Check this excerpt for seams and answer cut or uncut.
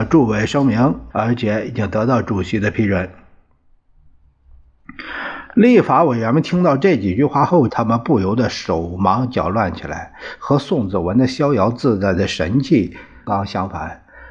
cut